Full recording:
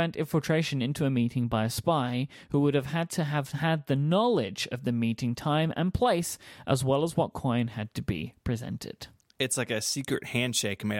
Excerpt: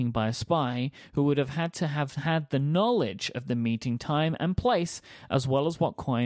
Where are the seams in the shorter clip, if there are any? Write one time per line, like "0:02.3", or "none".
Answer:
none